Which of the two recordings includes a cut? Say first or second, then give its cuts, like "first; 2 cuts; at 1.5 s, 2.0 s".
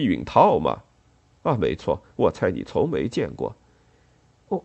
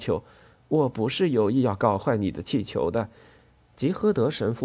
second; 1 cut; at 3.6 s